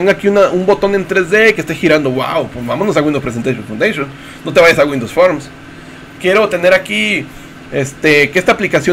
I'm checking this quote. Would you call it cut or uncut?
uncut